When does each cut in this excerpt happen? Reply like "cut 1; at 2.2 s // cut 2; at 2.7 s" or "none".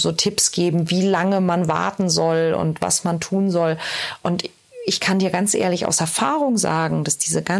none